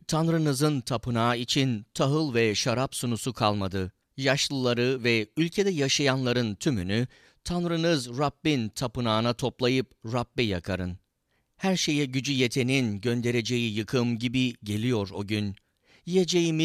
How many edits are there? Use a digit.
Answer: 2